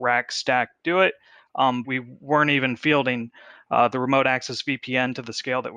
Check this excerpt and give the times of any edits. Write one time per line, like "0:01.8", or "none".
0:01.8